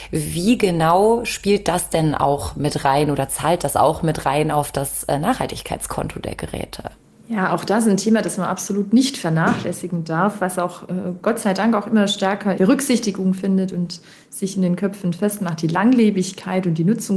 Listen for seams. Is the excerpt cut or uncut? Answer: uncut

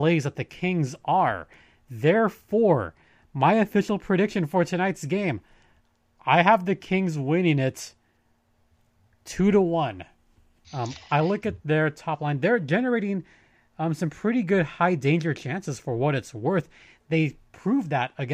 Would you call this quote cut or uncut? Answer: cut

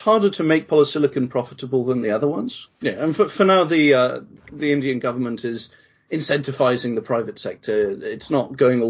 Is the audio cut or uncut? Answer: cut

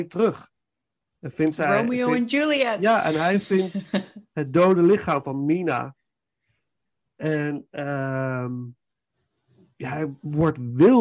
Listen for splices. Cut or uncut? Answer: uncut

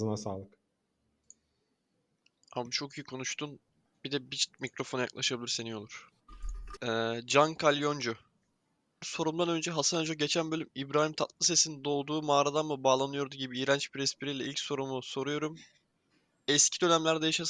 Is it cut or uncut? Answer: cut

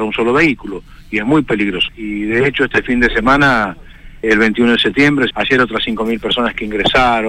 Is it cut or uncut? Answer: cut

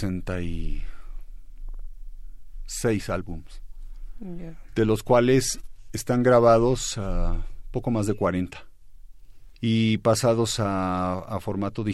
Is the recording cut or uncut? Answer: cut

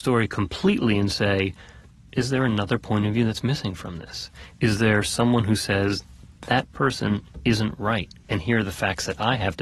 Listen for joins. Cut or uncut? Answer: uncut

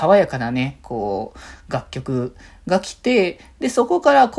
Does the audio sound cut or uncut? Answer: uncut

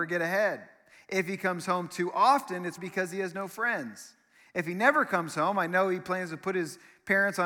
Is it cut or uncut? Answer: cut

